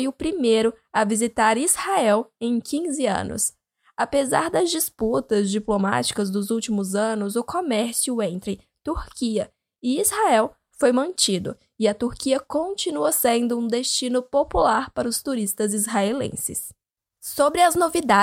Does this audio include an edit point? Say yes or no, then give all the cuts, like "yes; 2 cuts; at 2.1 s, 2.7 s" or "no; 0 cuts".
no; 0 cuts